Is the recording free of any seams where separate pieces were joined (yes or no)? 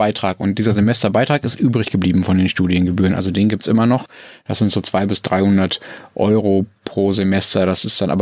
yes